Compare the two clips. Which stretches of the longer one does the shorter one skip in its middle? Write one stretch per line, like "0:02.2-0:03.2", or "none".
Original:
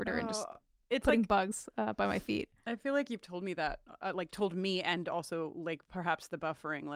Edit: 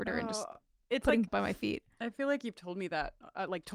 0:01.3-0:01.9